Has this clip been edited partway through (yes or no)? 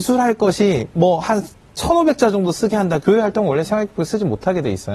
yes